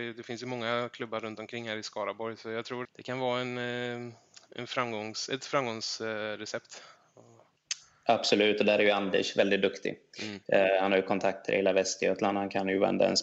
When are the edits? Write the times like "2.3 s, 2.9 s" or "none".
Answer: 2.8 s